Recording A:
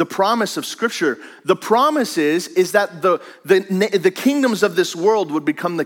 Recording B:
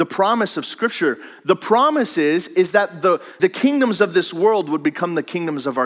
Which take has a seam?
B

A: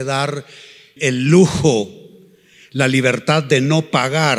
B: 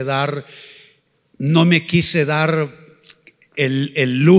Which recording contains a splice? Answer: A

